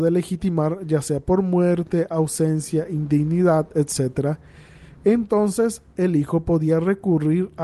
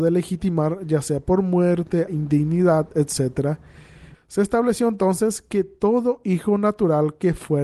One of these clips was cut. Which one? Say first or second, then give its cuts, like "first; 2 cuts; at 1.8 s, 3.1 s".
second; 2 cuts; at 2.1 s, 4.1 s